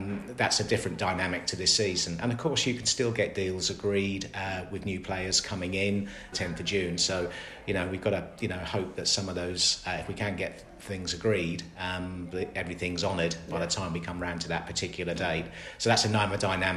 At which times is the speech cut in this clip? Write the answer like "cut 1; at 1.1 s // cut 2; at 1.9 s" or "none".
cut 1; at 6.3 s